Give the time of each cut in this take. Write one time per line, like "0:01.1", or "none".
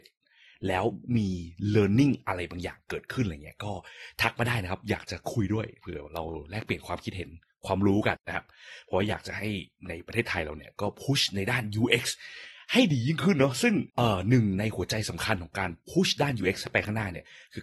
0:08.2
0:13.9